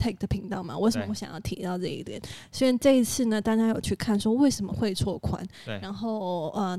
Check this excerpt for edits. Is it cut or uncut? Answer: cut